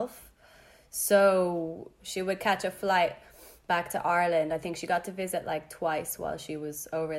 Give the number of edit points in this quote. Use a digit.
0